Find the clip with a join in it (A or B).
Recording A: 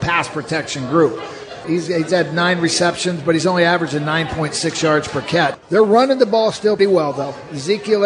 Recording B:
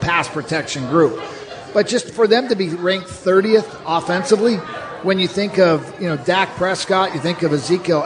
A